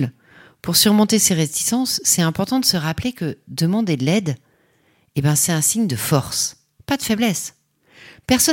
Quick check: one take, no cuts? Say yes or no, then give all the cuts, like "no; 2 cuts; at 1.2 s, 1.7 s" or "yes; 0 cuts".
yes; 0 cuts